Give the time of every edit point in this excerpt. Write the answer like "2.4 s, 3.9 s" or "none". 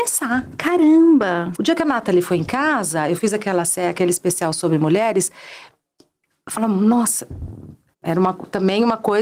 1.6 s, 7.9 s